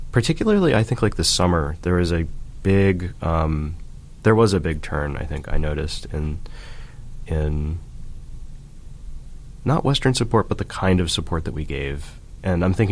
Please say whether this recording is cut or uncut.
uncut